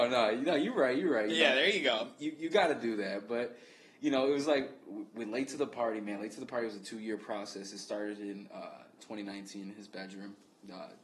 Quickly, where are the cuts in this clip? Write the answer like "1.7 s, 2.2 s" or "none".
none